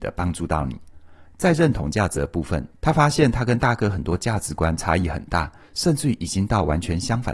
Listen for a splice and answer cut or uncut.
cut